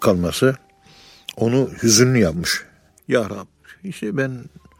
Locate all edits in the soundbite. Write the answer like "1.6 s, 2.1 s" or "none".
3.0 s